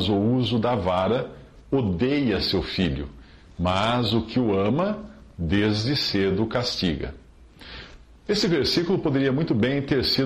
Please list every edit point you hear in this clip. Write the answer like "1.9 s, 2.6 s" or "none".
none